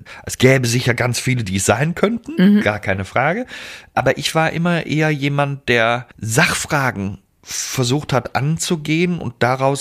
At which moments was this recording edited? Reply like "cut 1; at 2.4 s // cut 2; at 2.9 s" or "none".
cut 1; at 6.1 s